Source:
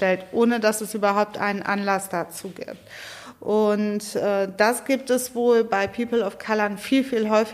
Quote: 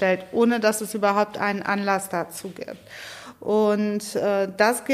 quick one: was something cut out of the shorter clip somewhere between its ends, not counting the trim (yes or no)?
no